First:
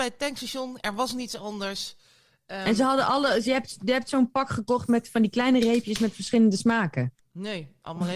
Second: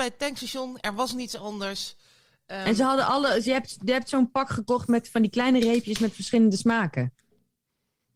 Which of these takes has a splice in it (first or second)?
first